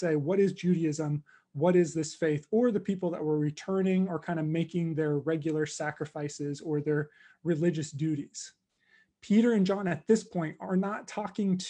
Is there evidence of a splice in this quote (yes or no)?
no